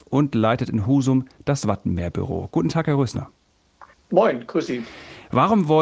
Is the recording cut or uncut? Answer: uncut